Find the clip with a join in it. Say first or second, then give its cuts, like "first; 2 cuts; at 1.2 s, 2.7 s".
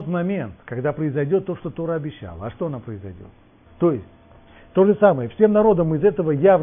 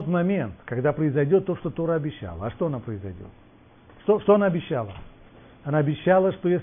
first; 1 cut; at 3.7 s